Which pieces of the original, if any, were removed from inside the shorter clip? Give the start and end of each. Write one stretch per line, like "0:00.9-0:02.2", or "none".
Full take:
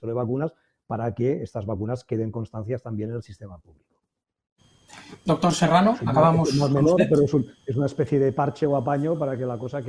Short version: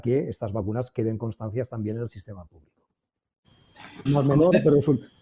0:05.2-0:06.5